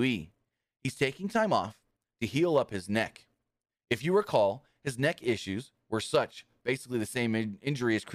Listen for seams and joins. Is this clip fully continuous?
yes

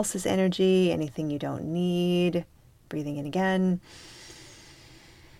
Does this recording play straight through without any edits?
yes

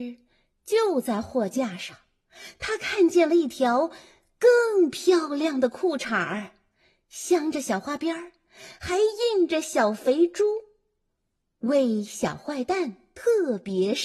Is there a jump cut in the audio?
no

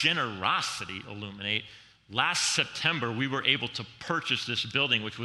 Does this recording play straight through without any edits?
yes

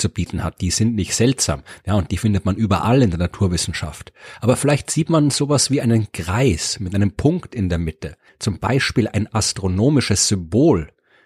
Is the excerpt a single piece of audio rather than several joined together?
no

